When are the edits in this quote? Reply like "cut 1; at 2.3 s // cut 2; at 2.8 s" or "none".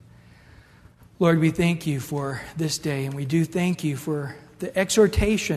none